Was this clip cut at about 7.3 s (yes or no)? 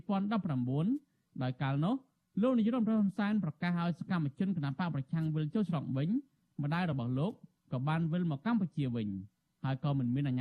no